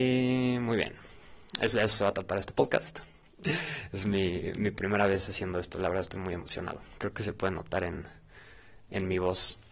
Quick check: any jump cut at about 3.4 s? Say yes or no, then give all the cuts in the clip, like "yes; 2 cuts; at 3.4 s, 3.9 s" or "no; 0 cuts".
yes; 1 cut; at 3.4 s